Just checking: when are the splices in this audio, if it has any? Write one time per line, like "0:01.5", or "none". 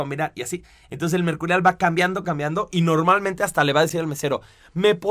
0:02.2